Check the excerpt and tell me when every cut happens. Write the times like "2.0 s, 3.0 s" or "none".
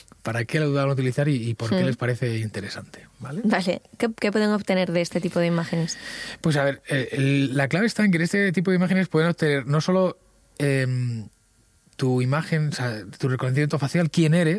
none